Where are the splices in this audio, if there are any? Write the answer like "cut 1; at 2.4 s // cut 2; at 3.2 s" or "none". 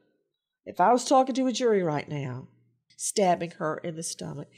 cut 1; at 2.9 s